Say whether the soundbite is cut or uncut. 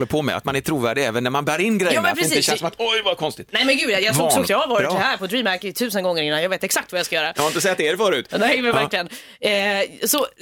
cut